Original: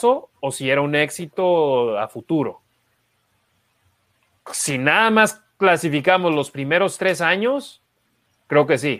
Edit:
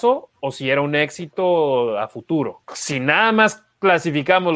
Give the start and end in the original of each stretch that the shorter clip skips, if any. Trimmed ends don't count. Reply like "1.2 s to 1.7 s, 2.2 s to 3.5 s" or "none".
2.6 s to 4.4 s